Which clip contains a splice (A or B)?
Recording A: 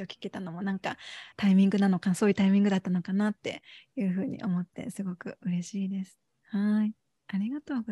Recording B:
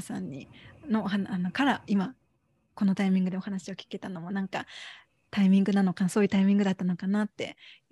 A